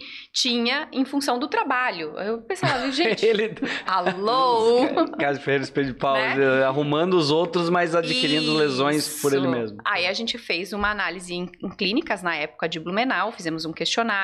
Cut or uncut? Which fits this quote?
uncut